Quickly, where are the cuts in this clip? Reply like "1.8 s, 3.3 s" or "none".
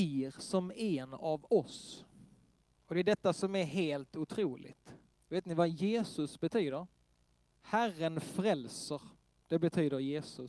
5.1 s, 7.5 s

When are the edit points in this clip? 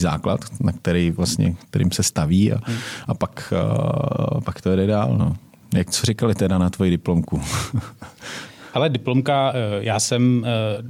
none

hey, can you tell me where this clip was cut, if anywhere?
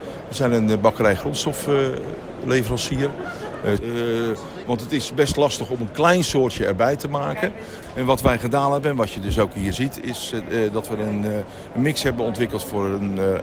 3.8 s

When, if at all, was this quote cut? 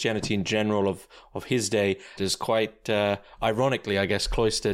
2.2 s

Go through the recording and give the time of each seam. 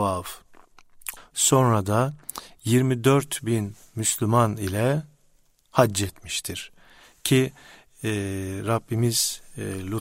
1.2 s

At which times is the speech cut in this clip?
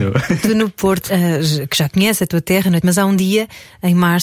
1.1 s, 2.8 s

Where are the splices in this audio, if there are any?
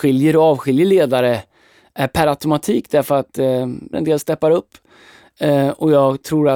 3.9 s

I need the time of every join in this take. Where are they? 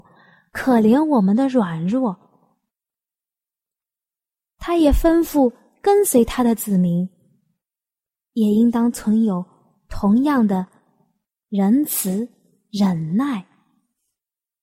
none

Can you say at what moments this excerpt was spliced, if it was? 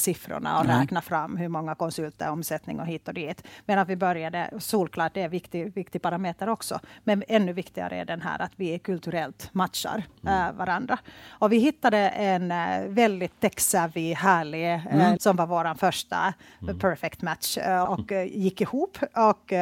15.2 s, 17.9 s

